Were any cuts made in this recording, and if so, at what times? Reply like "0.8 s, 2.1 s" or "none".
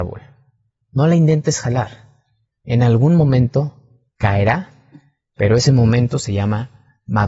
none